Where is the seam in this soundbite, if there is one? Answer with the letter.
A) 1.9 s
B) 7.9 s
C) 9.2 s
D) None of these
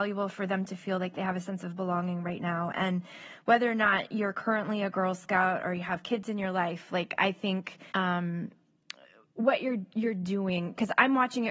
B